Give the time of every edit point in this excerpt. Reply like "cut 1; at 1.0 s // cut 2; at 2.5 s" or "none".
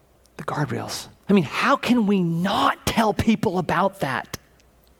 cut 1; at 1.3 s